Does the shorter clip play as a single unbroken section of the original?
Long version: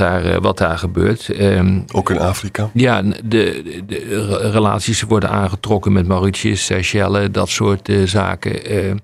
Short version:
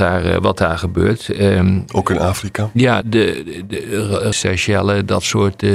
no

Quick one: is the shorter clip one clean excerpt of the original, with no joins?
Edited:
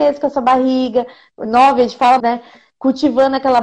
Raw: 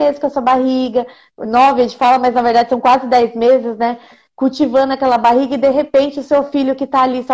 no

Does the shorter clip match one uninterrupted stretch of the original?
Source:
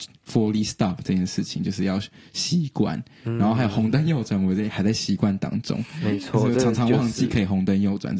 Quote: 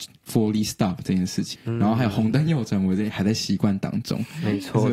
no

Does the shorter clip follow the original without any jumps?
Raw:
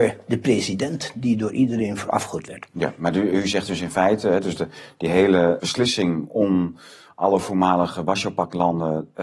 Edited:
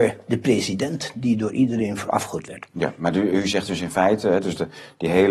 yes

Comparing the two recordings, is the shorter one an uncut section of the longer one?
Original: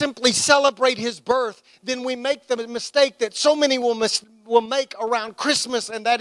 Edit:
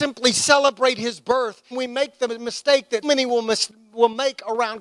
no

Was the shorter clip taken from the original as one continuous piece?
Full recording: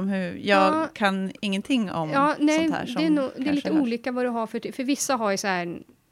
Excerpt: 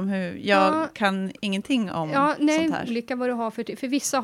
no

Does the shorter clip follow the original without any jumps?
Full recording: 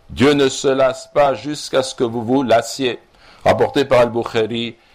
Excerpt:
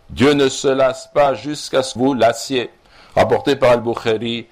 no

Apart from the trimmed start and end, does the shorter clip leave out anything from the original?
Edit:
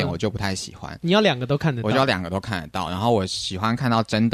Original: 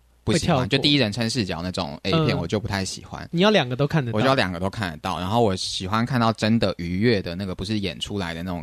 no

